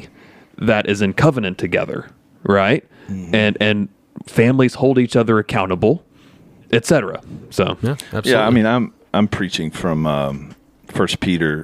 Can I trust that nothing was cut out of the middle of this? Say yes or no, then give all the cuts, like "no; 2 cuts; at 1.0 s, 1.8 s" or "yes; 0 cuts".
yes; 0 cuts